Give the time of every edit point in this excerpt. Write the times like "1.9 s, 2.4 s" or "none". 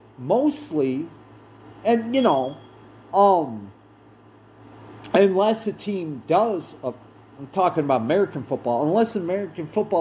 none